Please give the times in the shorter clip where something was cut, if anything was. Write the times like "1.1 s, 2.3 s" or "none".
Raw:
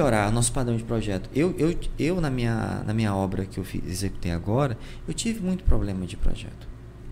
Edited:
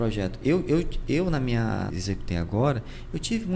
1.9 s